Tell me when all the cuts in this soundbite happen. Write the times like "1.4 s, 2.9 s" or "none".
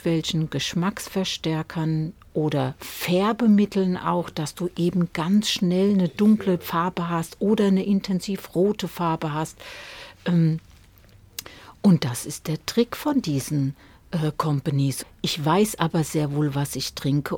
15.0 s